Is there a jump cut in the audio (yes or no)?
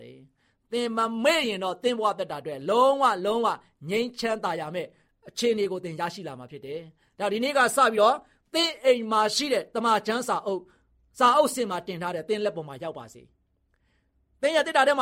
no